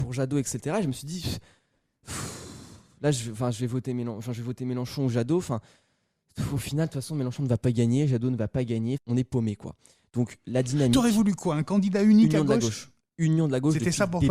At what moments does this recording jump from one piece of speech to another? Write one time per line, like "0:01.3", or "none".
0:09.0